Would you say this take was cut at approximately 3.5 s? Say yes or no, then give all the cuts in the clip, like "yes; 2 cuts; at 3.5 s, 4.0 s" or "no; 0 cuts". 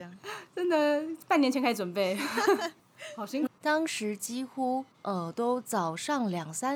yes; 1 cut; at 3.5 s